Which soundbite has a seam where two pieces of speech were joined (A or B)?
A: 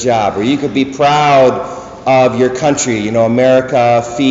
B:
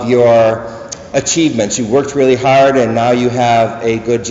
B